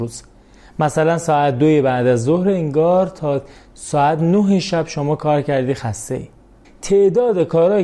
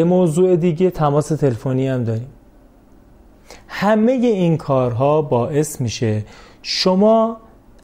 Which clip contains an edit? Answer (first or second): first